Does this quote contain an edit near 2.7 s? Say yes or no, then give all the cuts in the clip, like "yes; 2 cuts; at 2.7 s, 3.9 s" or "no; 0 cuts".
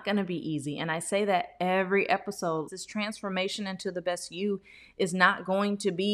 yes; 1 cut; at 2.7 s